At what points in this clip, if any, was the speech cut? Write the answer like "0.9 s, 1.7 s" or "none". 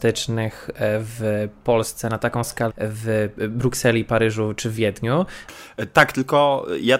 2.7 s

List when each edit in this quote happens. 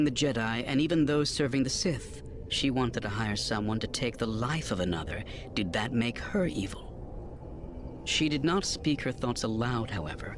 2.5 s

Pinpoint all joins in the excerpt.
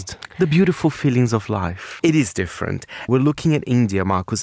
2.0 s, 3.1 s

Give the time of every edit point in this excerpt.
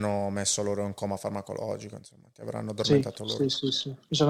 none

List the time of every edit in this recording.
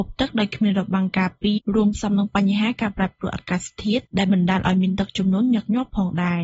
1.6 s

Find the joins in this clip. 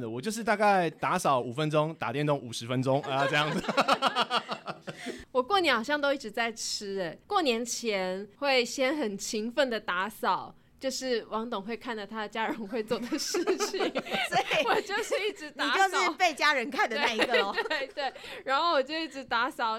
none

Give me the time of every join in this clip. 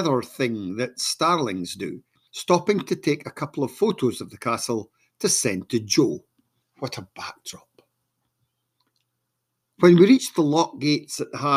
2.3 s, 6.6 s

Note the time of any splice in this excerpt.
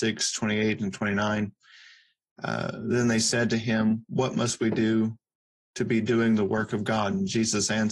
none

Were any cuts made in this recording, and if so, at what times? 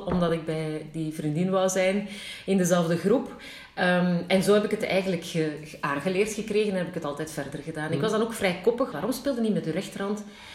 8.9 s

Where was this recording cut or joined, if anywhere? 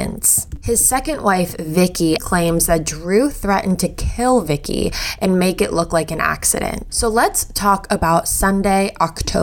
2.2 s, 6.9 s

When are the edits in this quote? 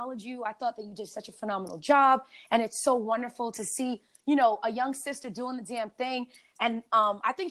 none

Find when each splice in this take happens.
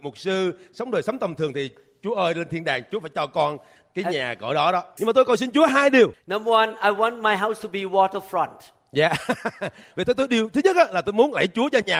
5.0 s

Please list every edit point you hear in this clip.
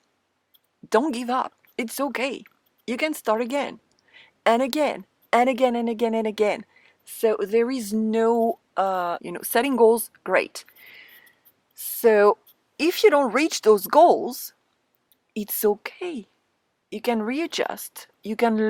9.2 s

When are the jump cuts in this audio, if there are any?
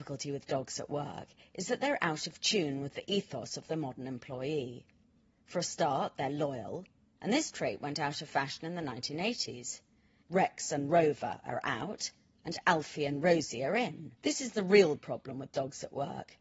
10.2 s, 14.2 s

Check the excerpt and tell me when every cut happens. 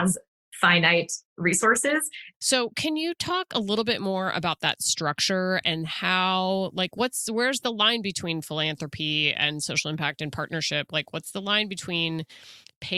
2.3 s

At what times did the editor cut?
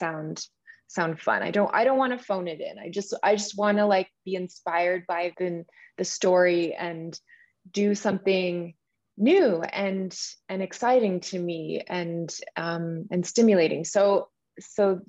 5.3 s

